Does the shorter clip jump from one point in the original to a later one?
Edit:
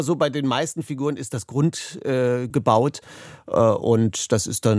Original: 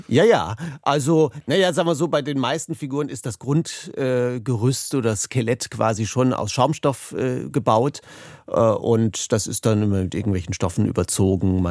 yes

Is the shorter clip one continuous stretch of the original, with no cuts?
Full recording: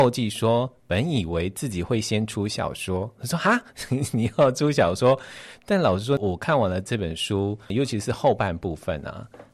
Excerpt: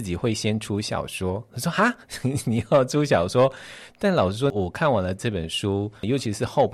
yes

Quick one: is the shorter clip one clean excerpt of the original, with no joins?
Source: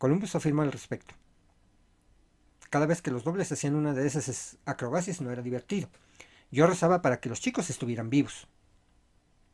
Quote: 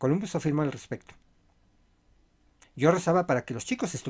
no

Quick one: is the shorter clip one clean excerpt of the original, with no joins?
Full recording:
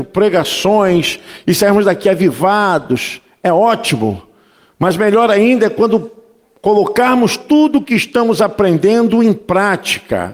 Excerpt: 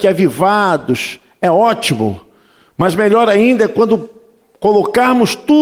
yes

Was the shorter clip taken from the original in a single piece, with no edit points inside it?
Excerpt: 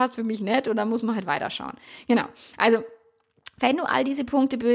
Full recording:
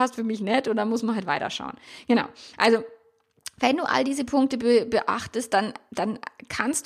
yes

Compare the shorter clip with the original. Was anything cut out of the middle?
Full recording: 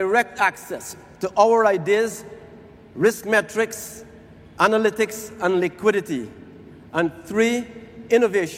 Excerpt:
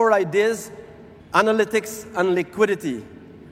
yes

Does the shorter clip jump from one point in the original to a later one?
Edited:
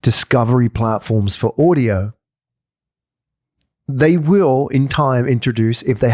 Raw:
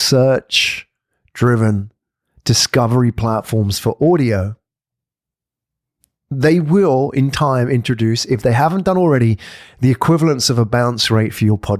no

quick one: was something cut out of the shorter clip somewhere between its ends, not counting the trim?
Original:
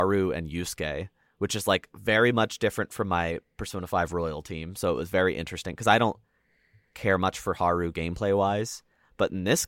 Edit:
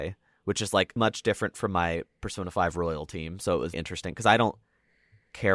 yes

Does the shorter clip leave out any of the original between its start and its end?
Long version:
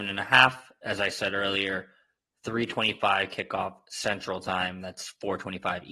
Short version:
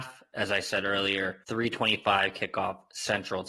yes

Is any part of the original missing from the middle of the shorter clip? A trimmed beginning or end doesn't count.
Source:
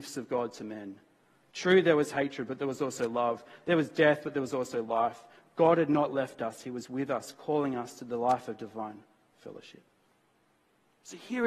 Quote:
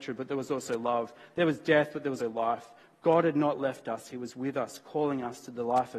yes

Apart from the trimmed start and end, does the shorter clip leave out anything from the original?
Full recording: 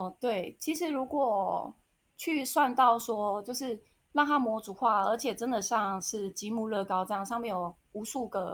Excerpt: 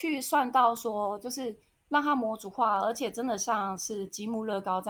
no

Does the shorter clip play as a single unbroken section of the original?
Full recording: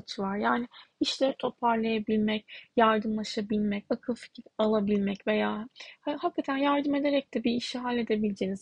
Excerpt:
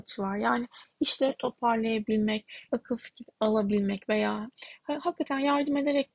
no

